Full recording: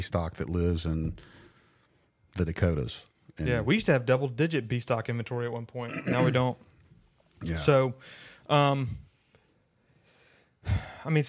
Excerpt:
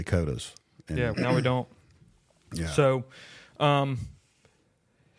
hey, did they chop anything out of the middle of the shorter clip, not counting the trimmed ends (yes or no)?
yes